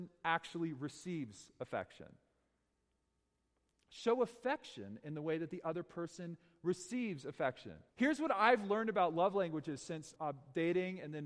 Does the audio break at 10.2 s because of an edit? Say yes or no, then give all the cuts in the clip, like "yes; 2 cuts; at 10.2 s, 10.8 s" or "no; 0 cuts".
yes; 2 cuts; at 7.9 s, 10.2 s